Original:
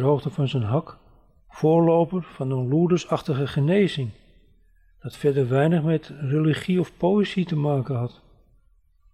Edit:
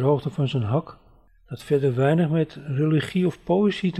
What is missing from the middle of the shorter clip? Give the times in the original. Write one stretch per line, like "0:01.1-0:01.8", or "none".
0:01.3-0:04.8